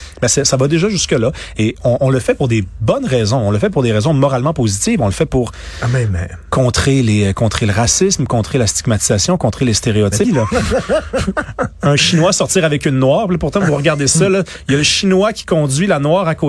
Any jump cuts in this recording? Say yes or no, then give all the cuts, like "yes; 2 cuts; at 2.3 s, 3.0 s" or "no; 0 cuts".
yes; 1 cut; at 10.2 s